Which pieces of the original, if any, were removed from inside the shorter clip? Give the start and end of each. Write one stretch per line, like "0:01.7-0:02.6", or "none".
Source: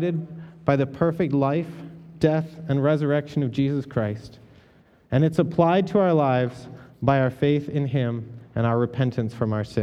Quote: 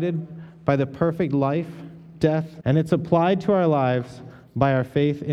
0:02.6-0:05.1